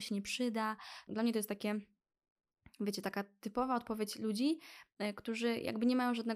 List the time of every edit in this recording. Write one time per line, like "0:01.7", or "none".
0:01.1